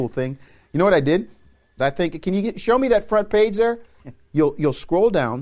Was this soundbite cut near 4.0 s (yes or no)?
yes